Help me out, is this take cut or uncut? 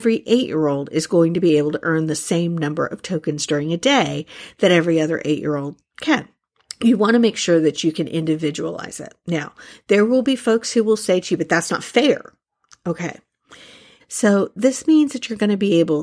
cut